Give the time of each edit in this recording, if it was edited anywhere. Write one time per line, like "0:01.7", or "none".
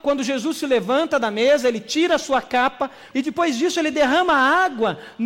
0:03.1

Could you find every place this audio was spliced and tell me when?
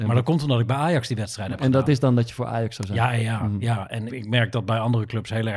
0:04.1

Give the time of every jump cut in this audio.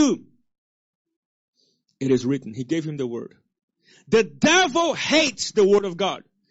none

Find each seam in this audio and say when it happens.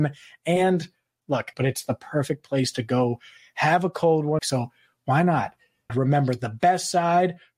0:01.5
0:04.4
0:05.9

